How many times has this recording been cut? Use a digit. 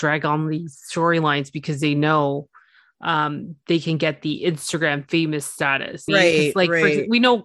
1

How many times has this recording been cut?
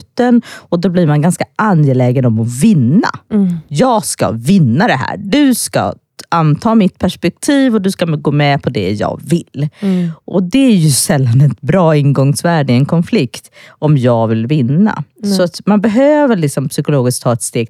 0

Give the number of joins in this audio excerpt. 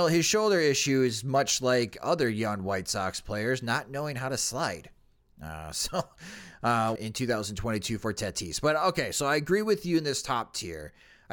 1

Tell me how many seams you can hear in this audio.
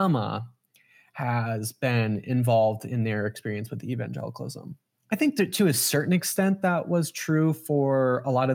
0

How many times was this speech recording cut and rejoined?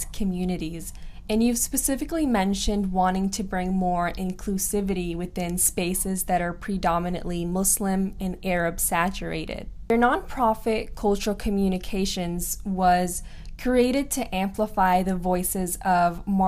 1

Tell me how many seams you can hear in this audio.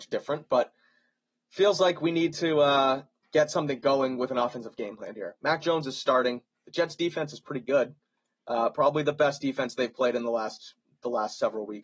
0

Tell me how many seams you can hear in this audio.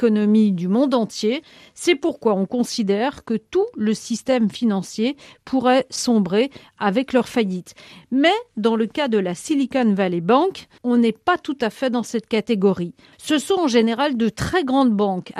2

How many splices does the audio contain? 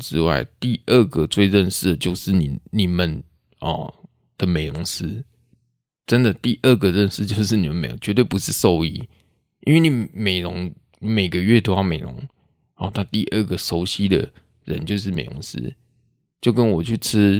0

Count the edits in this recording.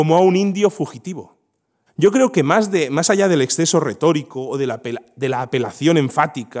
1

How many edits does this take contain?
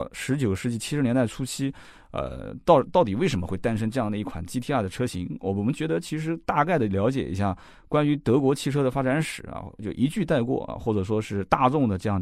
0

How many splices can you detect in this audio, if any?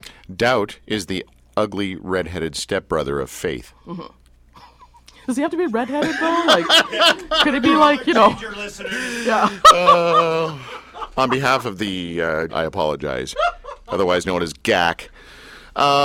1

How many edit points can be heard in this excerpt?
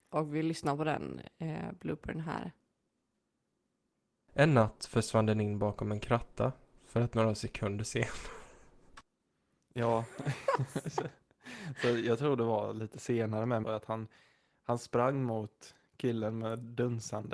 1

